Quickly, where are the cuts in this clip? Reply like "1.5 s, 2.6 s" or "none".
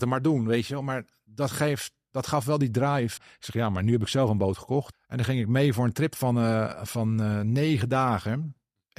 3.2 s, 4.9 s